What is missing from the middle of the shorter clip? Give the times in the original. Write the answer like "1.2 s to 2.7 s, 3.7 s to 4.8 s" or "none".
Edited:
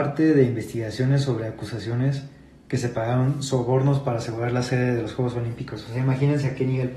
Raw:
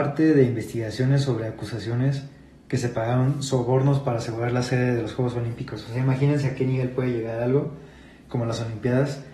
none